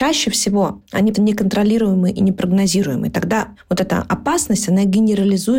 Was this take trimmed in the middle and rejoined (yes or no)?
yes